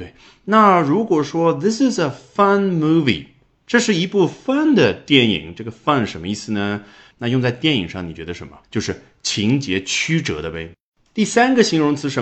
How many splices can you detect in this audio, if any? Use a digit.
2